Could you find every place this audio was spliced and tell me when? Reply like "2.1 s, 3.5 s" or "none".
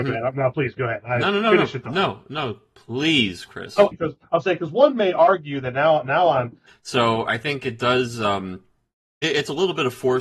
3.9 s, 6.7 s